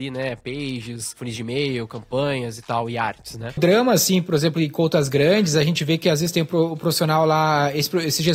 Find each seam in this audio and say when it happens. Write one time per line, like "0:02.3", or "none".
0:03.6